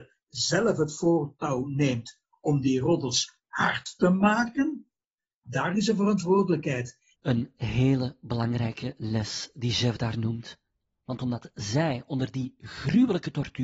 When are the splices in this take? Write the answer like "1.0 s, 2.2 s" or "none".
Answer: 5.4 s, 7.1 s, 10.9 s